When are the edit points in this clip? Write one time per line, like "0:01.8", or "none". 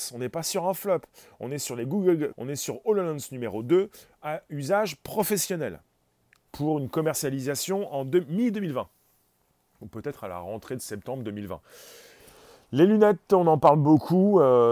0:02.3
0:06.5